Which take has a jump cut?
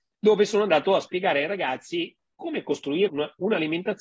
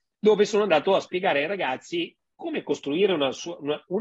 first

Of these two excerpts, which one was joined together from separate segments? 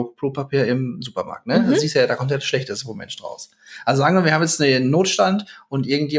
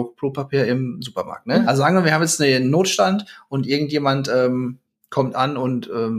second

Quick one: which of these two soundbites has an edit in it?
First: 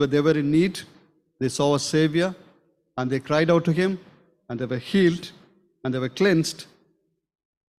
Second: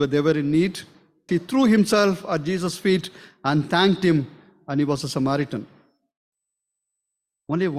second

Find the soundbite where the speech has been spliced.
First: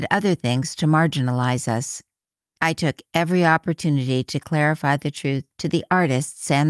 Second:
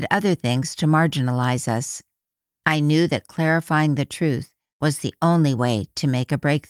first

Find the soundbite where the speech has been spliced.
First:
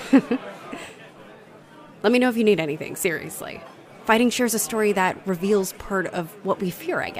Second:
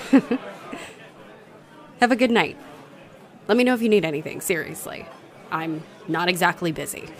first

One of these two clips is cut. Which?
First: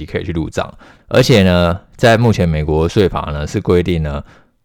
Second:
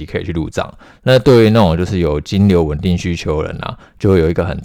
first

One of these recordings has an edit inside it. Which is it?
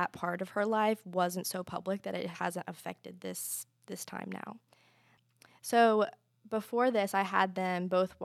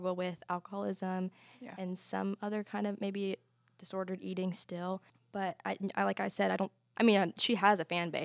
second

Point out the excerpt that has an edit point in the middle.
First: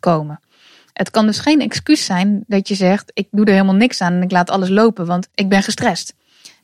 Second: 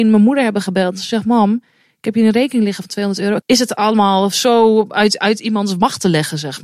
second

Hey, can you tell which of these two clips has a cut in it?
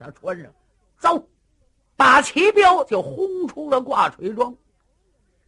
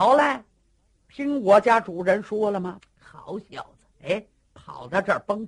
second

